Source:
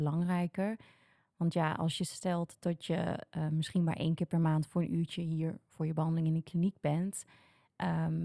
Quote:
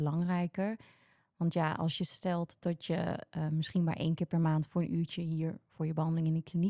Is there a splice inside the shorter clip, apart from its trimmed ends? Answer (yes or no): no